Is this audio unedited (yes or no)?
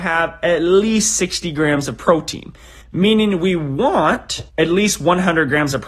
no